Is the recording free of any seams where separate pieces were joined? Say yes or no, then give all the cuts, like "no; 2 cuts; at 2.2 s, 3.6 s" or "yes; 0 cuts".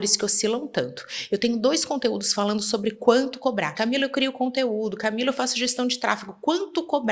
no; 1 cut; at 3.8 s